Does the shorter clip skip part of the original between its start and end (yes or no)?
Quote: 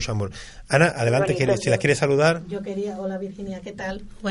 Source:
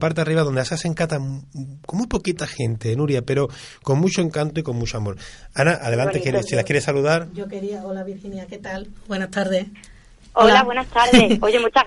no